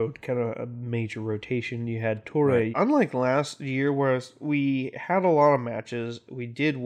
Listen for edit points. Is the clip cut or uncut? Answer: cut